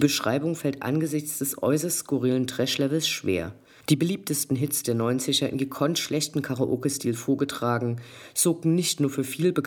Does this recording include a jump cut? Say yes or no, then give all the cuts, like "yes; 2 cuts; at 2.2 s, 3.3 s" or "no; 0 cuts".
yes; 1 cut; at 3.8 s